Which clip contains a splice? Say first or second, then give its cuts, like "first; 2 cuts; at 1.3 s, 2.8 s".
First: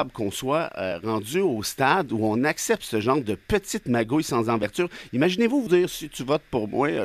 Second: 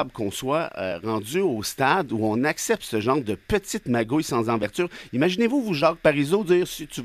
first; 1 cut; at 5.7 s